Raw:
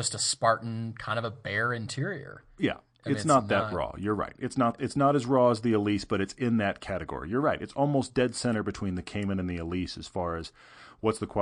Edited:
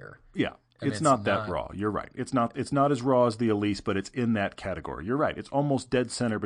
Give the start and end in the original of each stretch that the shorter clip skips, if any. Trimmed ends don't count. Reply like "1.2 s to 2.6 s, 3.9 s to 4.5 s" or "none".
none